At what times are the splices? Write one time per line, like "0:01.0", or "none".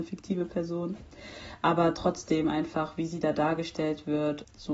none